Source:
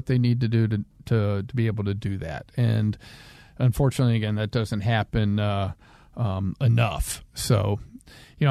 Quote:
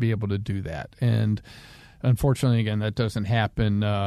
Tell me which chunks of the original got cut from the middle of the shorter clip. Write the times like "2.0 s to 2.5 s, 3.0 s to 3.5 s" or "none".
none